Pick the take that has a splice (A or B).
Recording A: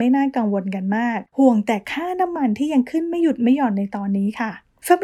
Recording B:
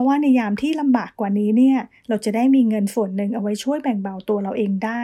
A